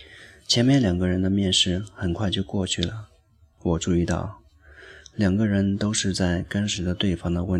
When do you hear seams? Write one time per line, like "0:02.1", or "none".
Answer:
none